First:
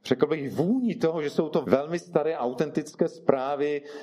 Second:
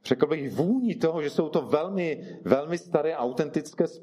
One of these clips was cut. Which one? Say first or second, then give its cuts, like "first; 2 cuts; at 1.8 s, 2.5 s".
first; 1 cut; at 1.6 s